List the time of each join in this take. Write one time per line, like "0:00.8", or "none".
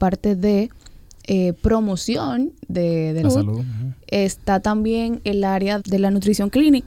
0:03.2
0:05.8